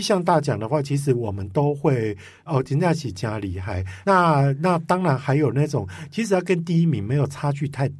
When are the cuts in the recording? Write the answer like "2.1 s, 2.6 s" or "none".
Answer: 2.5 s, 4.0 s